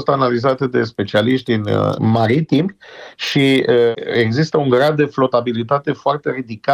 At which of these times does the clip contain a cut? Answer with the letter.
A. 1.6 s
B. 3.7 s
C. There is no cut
C